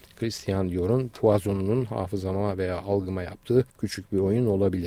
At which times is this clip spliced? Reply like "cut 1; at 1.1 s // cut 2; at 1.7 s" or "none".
cut 1; at 3.7 s